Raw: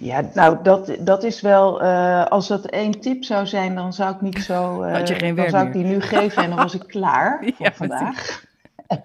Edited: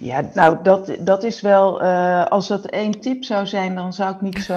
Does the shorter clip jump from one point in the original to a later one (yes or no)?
no